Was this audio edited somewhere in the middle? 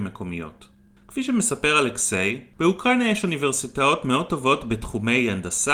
no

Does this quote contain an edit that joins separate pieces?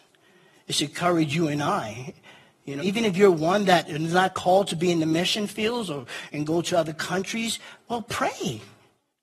yes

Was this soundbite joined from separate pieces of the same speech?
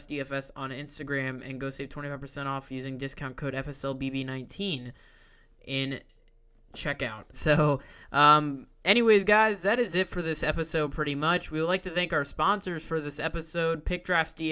yes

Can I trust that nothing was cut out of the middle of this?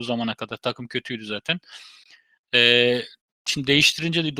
yes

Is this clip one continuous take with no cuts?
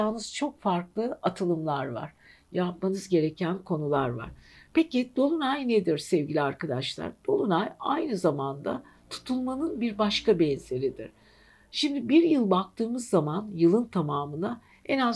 yes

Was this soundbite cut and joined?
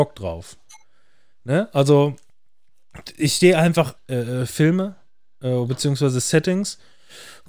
yes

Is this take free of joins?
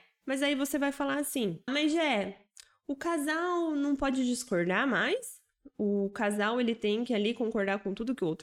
no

